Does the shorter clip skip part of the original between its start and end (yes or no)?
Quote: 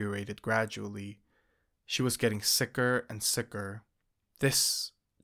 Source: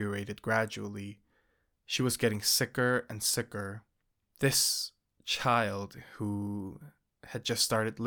no